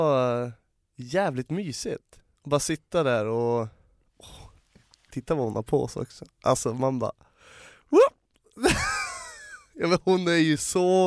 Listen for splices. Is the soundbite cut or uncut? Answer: uncut